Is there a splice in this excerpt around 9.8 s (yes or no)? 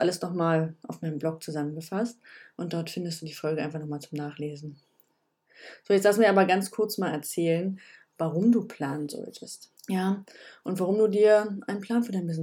yes